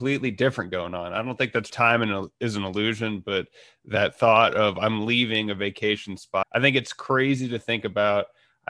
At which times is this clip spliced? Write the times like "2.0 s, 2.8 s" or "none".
1.7 s, 6.4 s